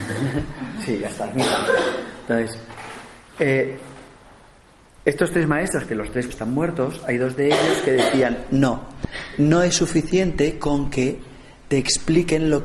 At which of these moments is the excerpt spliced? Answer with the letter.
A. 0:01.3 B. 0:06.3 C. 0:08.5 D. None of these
B